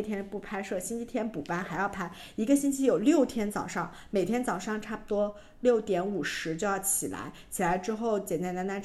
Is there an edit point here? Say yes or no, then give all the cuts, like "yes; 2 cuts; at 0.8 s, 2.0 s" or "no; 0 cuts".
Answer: no; 0 cuts